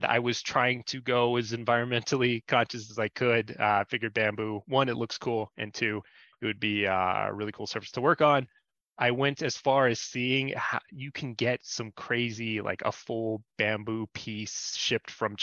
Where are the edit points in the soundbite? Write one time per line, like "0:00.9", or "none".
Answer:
none